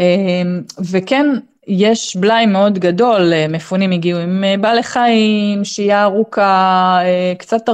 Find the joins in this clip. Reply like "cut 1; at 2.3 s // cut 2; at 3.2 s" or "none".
none